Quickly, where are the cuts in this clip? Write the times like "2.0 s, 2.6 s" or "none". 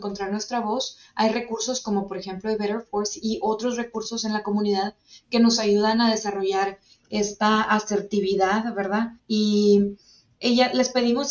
9.2 s